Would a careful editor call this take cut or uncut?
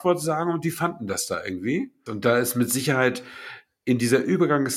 cut